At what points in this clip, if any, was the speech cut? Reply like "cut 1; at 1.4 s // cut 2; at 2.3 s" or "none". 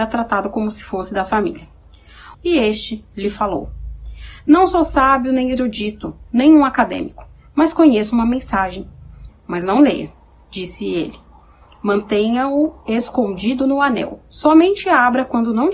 cut 1; at 2.3 s // cut 2; at 9.3 s